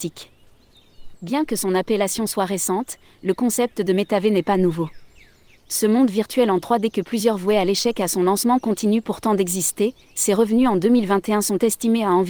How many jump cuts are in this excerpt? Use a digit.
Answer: 2